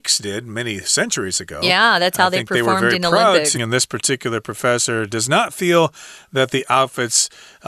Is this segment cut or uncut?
cut